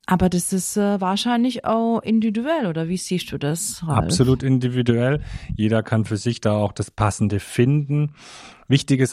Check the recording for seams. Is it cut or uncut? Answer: uncut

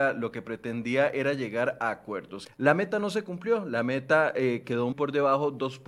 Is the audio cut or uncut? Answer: cut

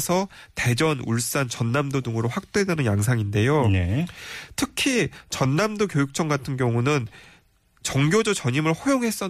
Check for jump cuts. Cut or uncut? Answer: uncut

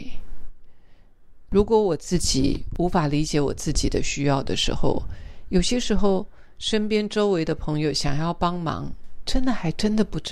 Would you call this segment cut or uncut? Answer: cut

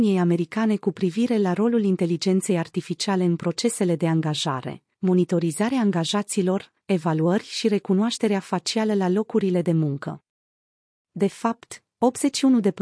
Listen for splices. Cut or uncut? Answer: cut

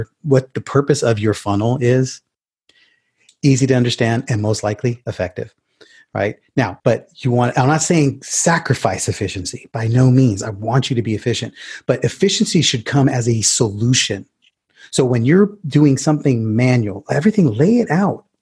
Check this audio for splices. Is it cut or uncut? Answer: cut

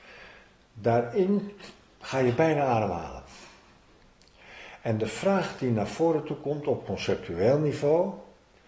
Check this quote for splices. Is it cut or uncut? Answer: uncut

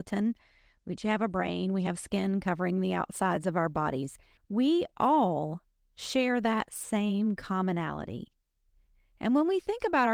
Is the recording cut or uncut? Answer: cut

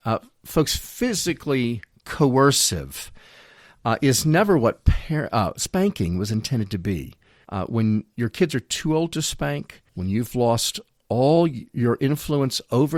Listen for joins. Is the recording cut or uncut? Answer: cut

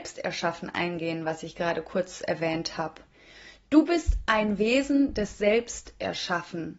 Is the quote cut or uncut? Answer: uncut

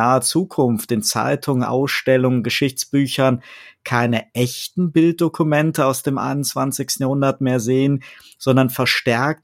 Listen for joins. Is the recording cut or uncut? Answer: uncut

